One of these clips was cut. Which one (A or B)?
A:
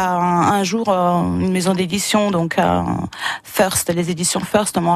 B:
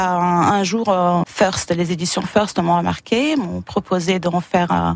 B